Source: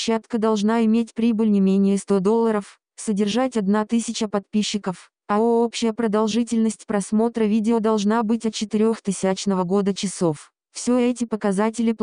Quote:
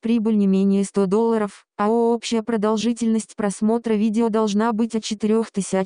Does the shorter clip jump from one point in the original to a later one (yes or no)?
yes